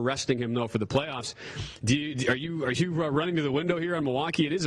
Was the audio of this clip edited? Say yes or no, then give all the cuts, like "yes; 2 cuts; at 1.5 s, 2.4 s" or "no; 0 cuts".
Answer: no; 0 cuts